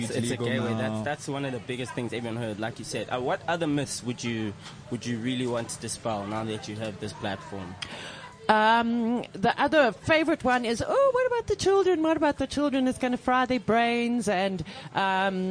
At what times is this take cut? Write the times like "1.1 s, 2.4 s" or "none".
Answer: none